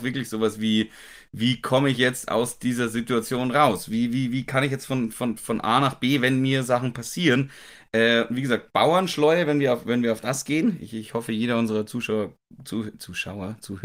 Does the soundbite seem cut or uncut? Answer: uncut